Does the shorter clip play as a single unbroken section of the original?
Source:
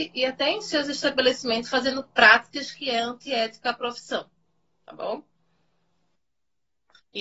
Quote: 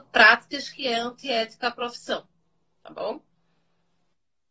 yes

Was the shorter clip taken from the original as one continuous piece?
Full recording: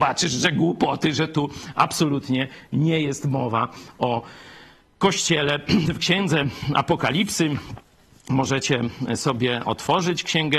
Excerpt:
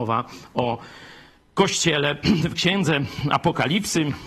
yes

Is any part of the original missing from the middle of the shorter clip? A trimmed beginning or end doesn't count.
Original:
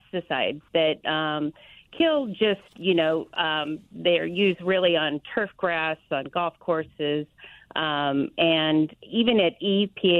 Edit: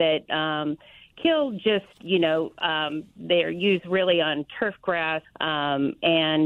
yes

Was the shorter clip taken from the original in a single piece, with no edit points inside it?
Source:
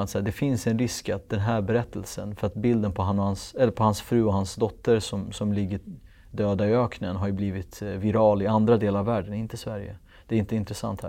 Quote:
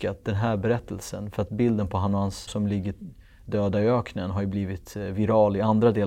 no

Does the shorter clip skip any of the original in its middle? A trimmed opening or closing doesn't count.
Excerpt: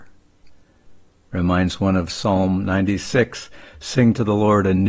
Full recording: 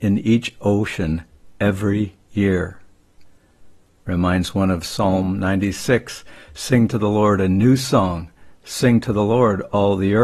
no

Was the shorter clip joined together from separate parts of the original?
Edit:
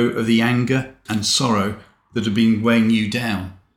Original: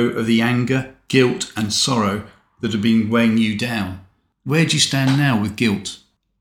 yes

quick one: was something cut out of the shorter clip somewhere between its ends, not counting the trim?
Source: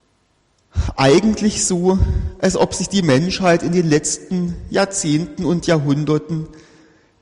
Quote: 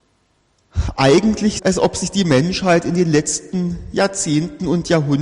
yes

